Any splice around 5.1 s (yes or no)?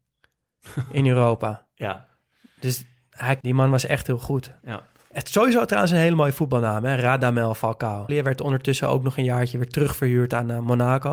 yes